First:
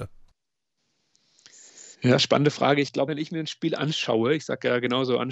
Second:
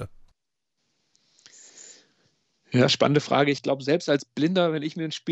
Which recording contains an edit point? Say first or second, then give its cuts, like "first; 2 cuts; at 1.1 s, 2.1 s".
first; 2 cuts; at 1.9 s, 3.1 s